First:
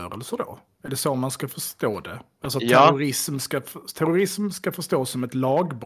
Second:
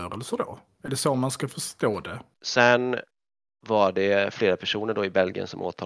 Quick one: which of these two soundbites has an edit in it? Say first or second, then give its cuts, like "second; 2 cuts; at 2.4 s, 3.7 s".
second; 1 cut; at 2.3 s